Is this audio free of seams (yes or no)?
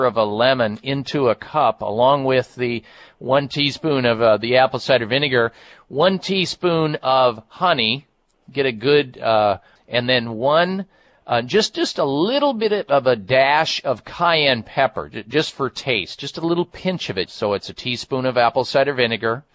no